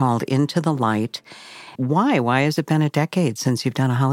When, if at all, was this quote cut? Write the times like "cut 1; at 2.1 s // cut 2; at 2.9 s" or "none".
cut 1; at 1.7 s